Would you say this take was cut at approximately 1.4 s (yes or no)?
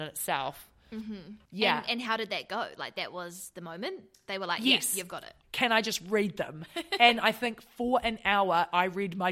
no